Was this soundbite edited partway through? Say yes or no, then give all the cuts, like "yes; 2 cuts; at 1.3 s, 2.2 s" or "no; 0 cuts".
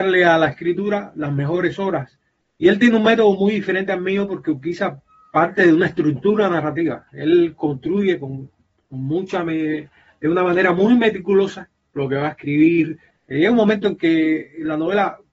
yes; 2 cuts; at 2.6 s, 13.1 s